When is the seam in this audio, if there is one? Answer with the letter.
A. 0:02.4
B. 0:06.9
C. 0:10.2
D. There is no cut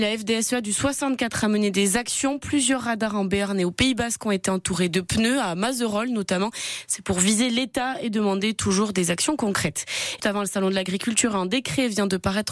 C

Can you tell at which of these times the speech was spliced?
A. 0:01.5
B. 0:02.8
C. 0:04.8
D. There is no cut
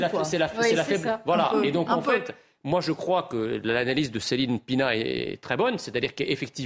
D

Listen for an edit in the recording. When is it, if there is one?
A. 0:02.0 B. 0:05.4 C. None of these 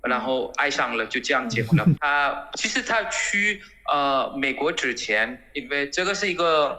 A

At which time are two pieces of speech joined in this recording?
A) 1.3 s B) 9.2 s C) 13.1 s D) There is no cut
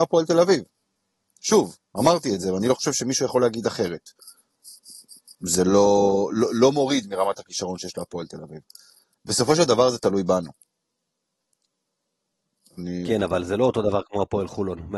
B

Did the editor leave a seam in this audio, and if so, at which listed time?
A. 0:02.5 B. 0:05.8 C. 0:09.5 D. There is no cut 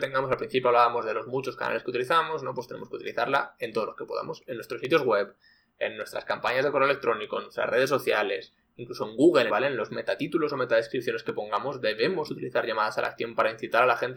C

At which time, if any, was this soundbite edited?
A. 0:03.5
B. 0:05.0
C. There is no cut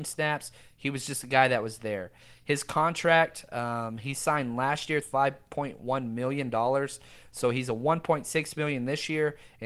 B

